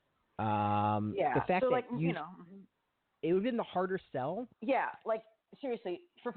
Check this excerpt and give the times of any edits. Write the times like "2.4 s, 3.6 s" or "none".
4.5 s